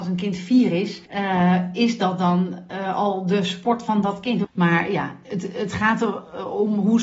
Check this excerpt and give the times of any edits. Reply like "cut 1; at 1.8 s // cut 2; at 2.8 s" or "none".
cut 1; at 1.1 s // cut 2; at 4.4 s